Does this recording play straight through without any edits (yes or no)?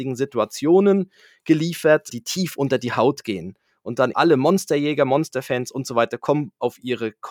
no